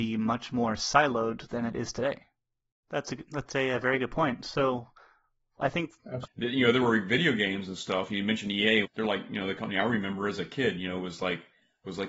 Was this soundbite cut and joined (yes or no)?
yes